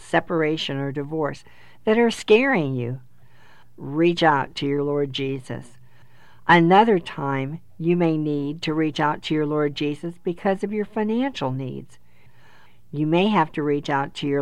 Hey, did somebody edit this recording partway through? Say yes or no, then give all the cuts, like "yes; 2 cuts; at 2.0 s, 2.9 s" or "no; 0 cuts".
no; 0 cuts